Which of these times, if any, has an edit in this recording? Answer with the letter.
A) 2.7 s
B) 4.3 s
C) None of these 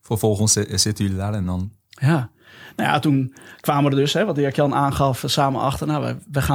C